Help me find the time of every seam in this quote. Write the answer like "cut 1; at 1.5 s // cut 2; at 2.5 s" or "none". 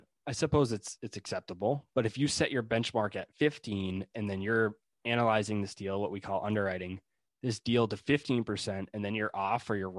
none